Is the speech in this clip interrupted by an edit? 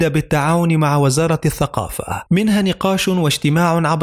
yes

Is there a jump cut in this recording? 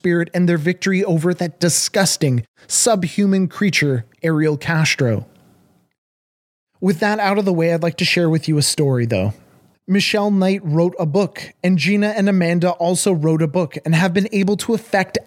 yes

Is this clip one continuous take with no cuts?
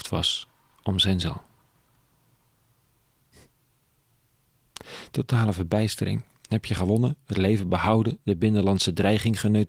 yes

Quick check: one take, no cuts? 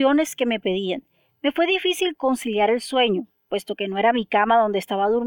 no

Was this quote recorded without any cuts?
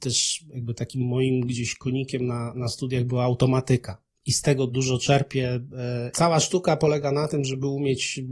no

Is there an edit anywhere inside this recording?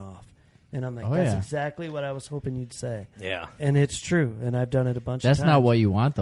no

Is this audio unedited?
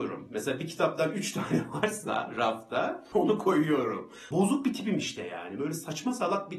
no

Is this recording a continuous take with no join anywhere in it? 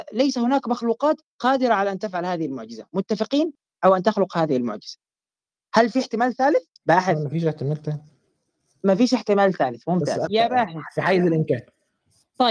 no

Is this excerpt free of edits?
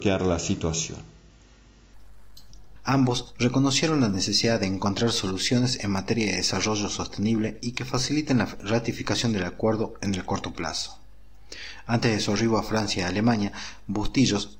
no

